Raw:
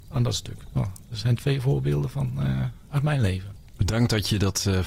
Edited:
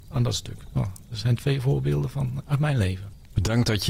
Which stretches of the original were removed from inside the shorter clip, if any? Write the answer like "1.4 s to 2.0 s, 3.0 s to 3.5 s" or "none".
2.4 s to 2.8 s